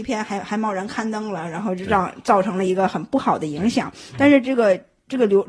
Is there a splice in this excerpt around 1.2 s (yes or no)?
no